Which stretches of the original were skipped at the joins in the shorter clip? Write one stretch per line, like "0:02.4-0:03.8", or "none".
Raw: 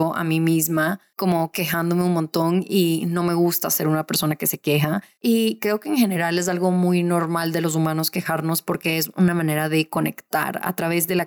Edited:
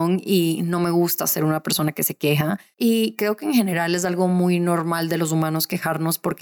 none